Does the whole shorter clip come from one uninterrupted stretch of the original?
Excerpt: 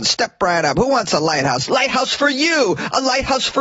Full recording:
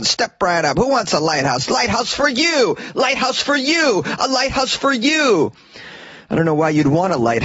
no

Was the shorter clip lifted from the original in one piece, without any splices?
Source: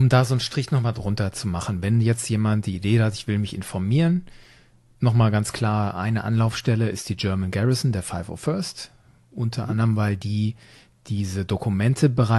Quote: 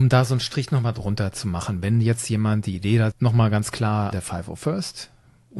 no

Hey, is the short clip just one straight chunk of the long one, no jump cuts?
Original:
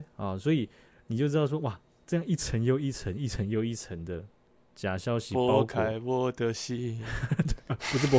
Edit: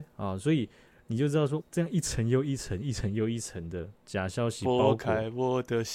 no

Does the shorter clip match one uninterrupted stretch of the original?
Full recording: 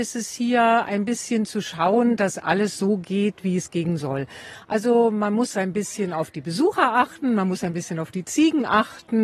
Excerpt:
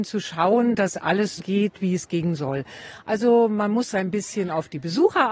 no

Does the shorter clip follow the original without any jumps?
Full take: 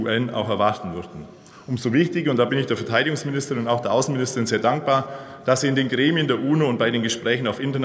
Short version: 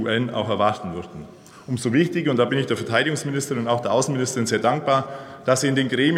yes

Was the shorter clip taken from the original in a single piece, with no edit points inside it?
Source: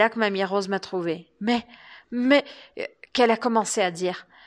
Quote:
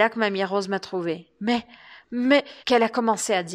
no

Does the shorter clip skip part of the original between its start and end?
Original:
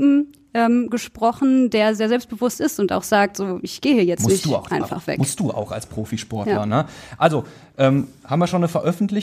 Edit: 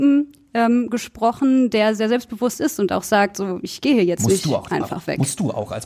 no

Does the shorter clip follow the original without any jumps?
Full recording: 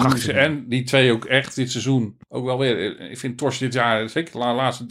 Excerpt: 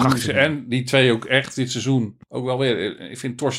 yes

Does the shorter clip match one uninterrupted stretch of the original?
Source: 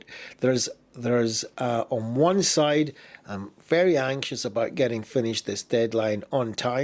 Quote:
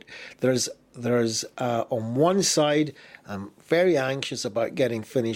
yes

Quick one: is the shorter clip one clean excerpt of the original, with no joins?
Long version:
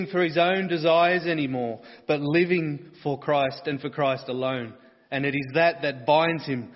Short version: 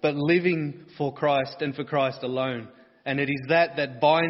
yes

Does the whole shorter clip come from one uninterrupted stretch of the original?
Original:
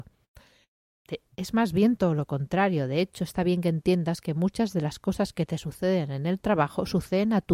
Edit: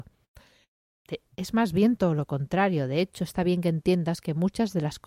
yes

